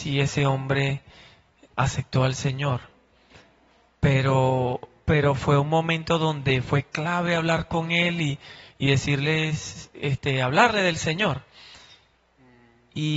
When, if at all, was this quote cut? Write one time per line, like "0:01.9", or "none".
none